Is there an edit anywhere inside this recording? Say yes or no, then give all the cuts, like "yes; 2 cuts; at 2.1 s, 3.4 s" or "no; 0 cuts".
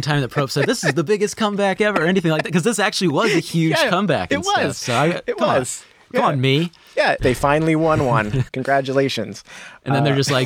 yes; 2 cuts; at 7.2 s, 8.5 s